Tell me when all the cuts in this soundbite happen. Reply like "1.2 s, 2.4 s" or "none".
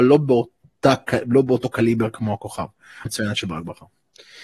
3.1 s

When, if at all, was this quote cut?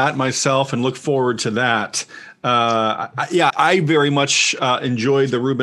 3.5 s

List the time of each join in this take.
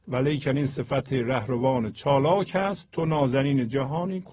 none

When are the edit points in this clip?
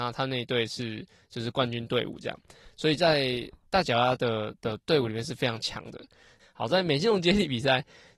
6.4 s

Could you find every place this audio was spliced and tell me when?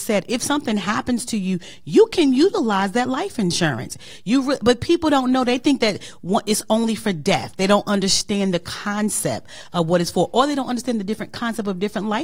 none

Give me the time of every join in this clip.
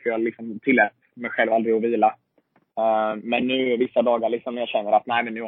none

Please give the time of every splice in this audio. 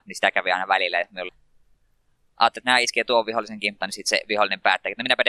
1.3 s, 2.6 s, 3.8 s

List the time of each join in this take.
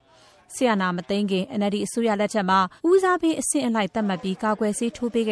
2.8 s

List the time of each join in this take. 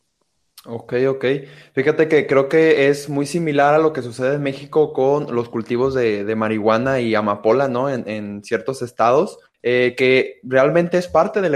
none

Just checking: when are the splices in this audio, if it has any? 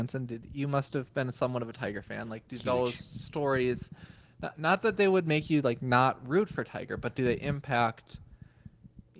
none

